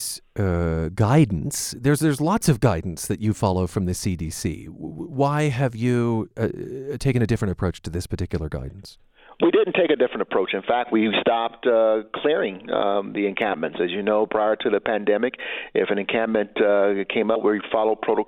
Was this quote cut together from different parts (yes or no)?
no